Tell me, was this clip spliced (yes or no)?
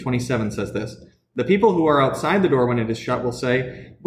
no